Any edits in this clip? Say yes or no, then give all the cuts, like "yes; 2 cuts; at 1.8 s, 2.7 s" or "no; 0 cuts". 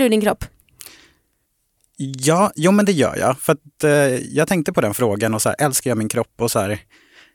no; 0 cuts